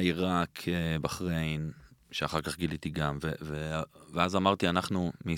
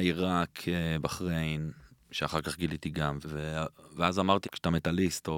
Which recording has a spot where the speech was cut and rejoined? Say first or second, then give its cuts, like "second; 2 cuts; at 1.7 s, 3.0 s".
second; 2 cuts; at 3.2 s, 4.4 s